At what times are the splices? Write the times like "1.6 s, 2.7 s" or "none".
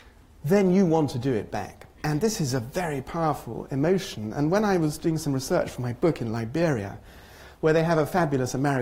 1.9 s

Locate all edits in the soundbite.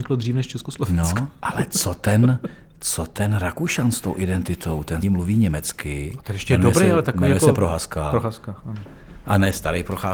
5.0 s

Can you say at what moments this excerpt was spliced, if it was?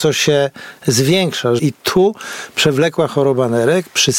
1.6 s

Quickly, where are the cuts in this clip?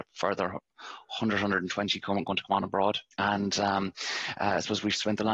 3.1 s

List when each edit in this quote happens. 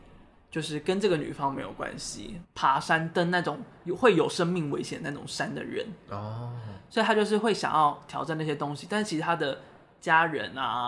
2.4 s

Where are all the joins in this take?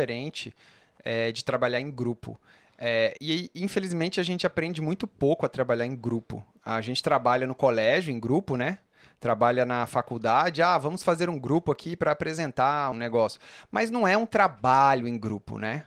3.2 s, 12.9 s

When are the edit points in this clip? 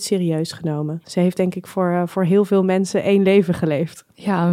1.0 s

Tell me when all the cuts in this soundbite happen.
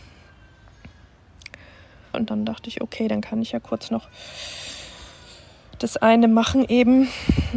2.1 s

